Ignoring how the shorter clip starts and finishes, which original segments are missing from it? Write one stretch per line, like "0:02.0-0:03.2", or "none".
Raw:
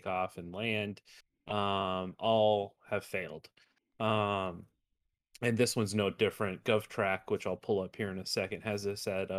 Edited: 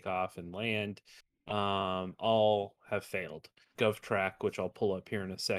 0:03.7-0:06.6